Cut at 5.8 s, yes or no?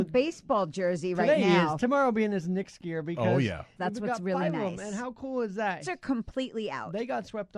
yes